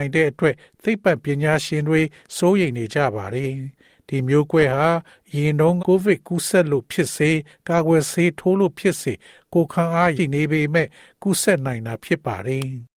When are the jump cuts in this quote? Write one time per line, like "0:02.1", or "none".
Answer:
0:05.8
0:10.2